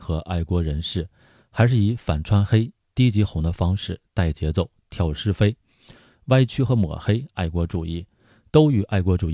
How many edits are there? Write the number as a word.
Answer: zero